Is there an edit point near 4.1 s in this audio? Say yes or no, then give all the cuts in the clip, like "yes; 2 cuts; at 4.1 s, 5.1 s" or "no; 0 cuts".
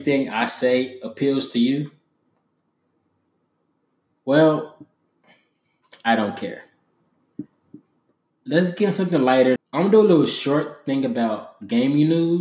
no; 1 cut; at 9.6 s